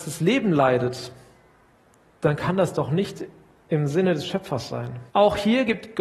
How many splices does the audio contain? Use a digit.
1